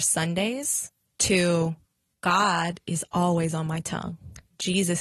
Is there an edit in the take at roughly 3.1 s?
no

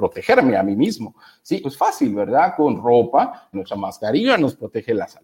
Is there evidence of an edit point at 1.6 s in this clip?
yes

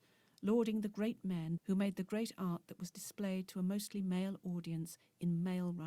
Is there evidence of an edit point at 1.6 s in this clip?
yes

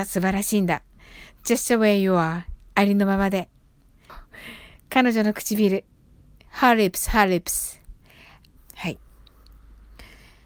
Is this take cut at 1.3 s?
no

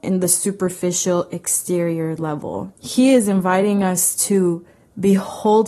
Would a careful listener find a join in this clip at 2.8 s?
yes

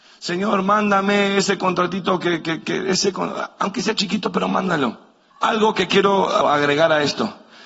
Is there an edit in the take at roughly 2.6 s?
no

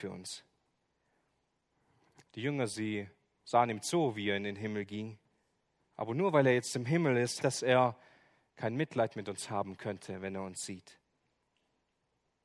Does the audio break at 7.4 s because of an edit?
yes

